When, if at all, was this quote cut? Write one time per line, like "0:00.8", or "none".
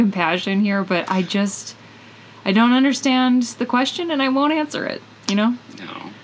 none